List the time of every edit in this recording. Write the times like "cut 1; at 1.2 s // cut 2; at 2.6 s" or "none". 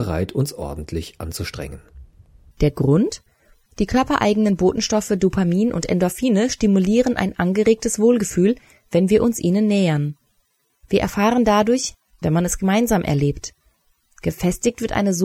cut 1; at 3.7 s // cut 2; at 12.2 s